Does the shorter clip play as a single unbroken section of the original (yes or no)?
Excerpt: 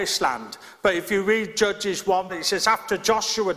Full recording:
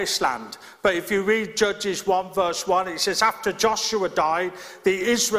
no